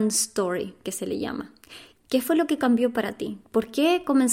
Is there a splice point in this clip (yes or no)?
yes